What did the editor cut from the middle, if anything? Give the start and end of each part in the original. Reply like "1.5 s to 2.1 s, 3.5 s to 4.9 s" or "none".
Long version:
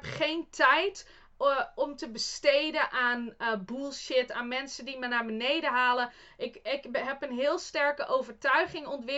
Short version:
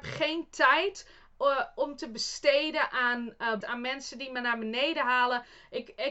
3.6 s to 4.3 s

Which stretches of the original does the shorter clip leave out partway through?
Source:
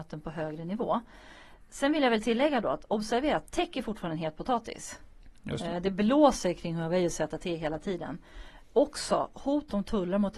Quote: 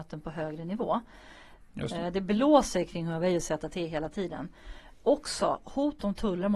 1.7 s to 5.4 s

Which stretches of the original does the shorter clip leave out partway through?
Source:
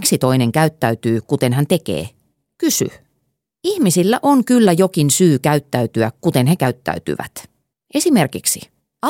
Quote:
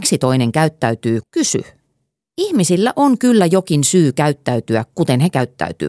1.2 s to 2.5 s

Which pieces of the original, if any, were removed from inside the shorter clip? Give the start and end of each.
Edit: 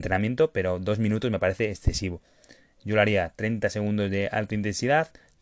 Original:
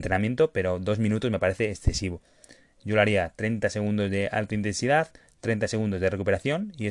none

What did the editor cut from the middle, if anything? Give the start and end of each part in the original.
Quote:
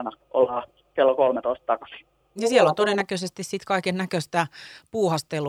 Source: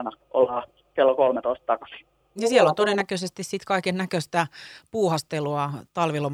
none

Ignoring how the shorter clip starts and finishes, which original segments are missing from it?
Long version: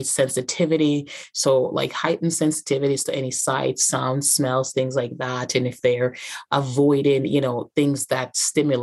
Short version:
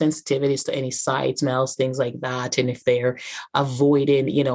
3.8 s to 4.4 s

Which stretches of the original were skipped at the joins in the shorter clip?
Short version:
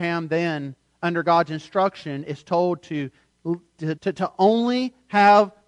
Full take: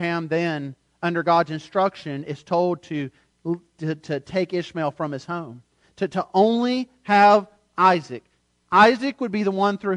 4.0 s to 5.9 s

